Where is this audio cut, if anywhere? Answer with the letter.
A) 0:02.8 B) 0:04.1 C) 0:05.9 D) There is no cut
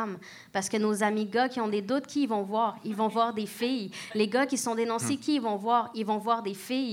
D